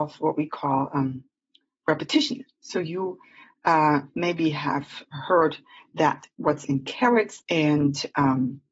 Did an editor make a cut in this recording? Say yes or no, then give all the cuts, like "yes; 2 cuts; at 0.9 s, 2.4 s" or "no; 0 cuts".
yes; 2 cuts; at 2.5 s, 7.4 s